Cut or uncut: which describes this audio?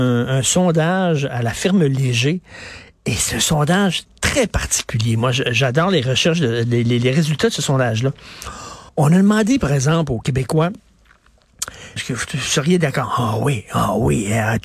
cut